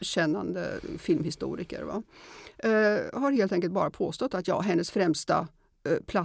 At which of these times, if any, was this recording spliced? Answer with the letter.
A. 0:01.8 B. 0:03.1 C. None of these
C